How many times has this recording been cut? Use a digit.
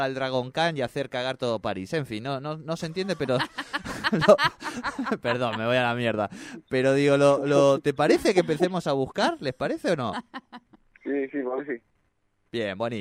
0